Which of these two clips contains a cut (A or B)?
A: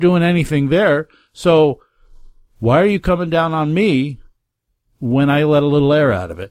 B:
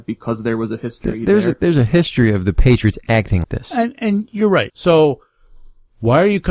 B